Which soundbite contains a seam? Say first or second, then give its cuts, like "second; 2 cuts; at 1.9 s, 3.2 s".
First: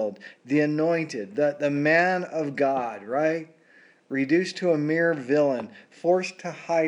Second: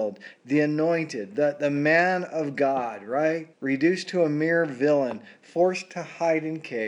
second; 1 cut; at 3.5 s